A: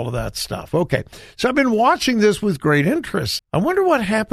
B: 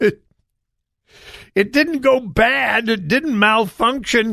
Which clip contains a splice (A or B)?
A